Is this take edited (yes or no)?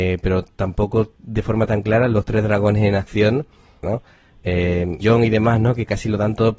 yes